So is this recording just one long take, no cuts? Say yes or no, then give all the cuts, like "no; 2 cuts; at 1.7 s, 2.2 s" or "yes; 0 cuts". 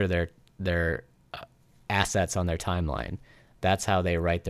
yes; 0 cuts